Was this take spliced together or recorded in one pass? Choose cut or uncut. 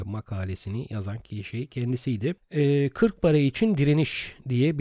uncut